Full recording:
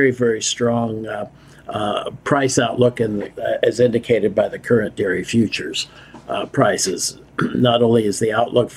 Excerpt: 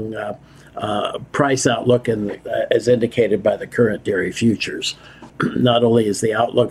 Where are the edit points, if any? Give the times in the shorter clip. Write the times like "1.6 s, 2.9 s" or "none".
5.3 s

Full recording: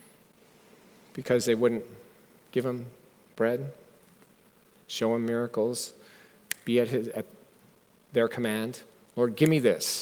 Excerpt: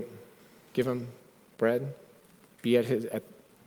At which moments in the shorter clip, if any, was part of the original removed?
2.6 s

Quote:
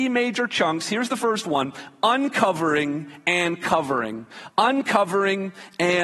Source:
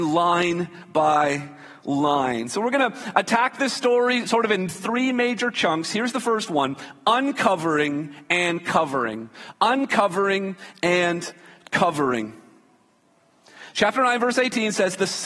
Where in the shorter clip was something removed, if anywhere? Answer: none

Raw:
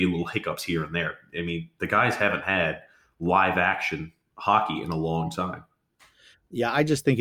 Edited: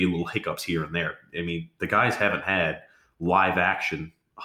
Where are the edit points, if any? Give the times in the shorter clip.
none

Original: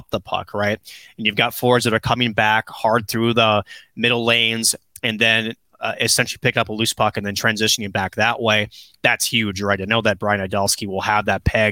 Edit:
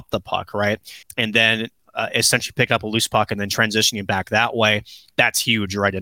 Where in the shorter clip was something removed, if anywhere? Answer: 1.0 s

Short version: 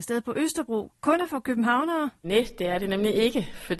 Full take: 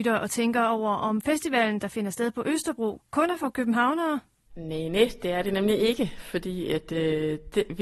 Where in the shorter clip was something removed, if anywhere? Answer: 2.2 s

